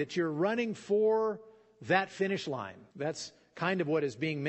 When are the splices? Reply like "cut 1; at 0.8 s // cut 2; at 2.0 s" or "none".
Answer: cut 1; at 2.9 s